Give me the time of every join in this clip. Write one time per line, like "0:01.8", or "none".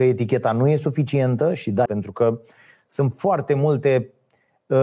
0:01.9

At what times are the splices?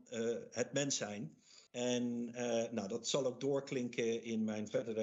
0:01.7

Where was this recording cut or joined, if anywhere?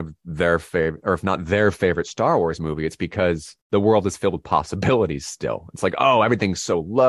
0:03.6

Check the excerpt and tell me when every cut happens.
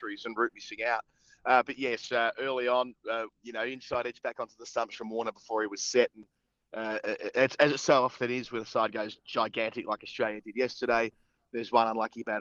none

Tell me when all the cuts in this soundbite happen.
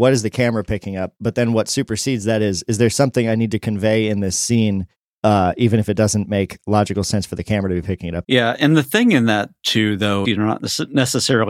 0:08.2
0:10.2

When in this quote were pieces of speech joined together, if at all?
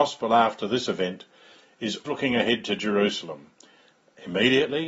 0:02.0

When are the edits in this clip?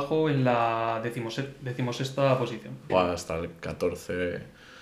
0:02.9

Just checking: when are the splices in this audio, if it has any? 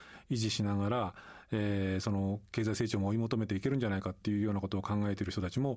none

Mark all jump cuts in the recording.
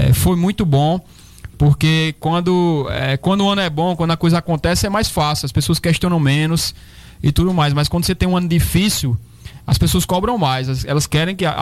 none

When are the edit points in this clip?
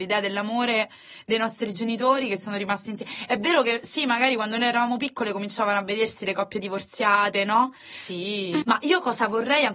0:08.6

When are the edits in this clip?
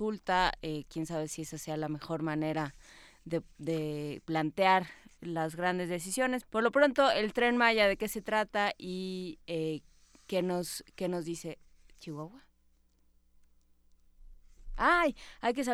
0:06.4

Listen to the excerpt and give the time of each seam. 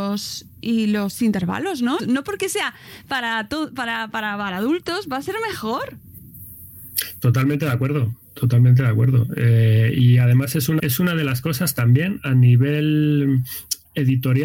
0:02.0
0:10.8

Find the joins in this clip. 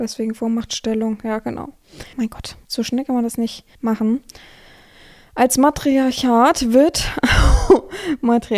0:02.1
0:03.7

